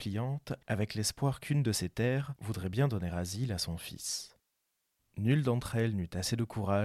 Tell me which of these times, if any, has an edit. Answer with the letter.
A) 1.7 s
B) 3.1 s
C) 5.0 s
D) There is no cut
C